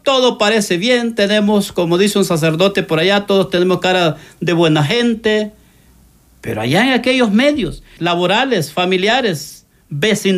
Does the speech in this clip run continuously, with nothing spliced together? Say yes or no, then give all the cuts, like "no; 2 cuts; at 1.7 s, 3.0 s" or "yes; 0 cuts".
no; 1 cut; at 8.0 s